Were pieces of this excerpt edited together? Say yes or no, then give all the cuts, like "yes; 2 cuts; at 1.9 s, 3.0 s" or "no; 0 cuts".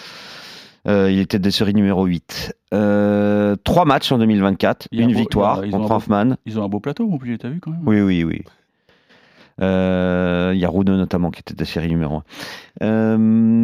no; 0 cuts